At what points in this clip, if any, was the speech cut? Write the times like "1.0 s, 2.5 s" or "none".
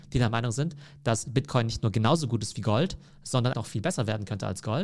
3.5 s